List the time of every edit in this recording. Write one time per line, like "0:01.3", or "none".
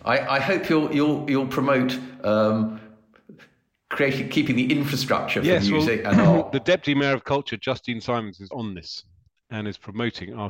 0:08.5